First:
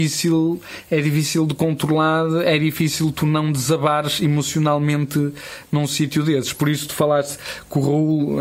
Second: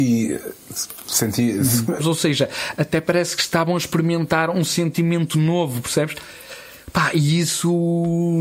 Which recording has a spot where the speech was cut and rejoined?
second; 1 cut; at 2.0 s

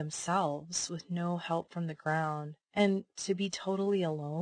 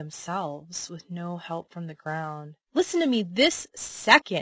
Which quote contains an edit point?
second; 1 cut; at 2.7 s

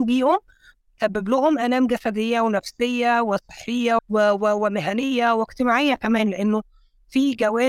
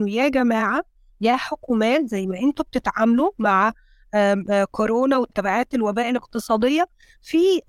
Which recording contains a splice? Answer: first; 1 cut; at 4.0 s

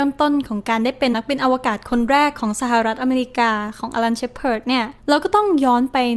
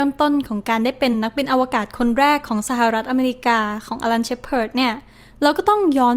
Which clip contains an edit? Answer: first; 2 cuts; at 1.1 s, 5.0 s

